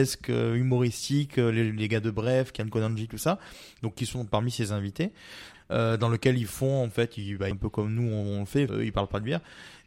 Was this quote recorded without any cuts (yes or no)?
no